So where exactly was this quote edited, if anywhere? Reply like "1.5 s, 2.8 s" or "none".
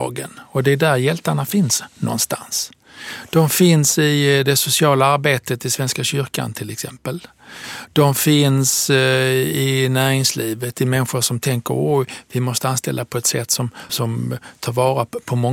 13.9 s